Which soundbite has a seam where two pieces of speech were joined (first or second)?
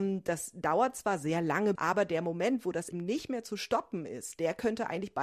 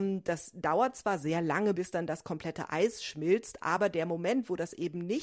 first